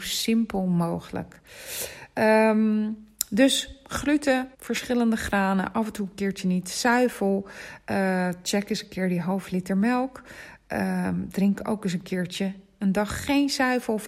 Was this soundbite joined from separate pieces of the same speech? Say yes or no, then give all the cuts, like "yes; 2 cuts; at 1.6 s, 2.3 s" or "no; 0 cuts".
yes; 1 cut; at 4.5 s